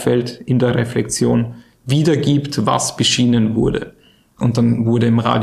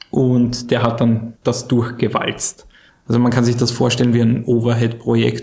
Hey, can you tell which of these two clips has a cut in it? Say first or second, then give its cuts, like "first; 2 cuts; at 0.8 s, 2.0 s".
second; 2 cuts; at 1.4 s, 2.9 s